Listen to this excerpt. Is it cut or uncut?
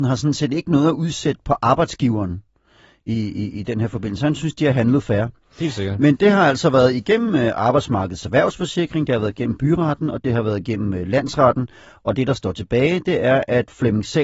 uncut